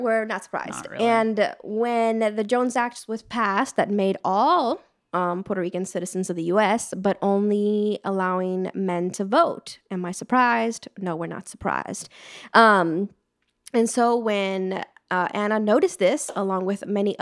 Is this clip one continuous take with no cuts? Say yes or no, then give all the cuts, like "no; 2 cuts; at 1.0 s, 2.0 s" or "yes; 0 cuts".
yes; 0 cuts